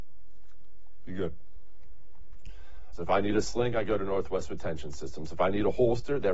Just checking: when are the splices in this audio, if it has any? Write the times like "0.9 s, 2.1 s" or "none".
2.9 s